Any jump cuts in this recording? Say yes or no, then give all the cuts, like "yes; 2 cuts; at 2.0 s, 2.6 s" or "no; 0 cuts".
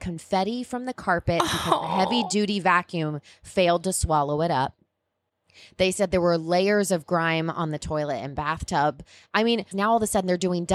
yes; 1 cut; at 9.7 s